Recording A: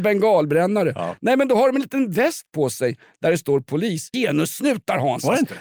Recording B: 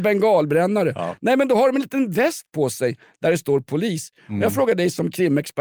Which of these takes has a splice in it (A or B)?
A